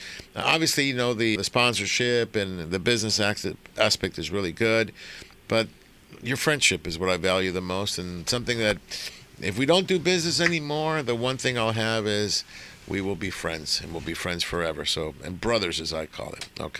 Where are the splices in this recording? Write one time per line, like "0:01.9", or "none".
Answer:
0:01.4
0:05.4